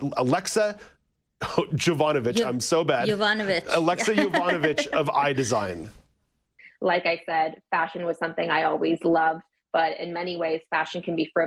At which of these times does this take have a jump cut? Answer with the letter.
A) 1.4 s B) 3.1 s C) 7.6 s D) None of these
D